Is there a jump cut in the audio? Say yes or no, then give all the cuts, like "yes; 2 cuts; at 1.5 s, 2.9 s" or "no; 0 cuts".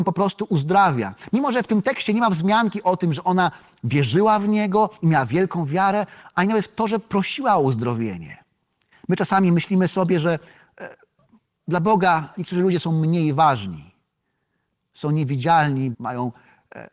yes; 2 cuts; at 8.9 s, 15.9 s